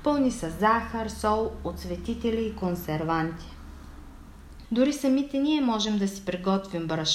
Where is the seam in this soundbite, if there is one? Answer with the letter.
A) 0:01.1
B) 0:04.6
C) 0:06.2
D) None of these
B